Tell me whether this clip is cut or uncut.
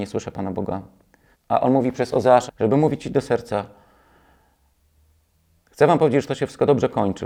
cut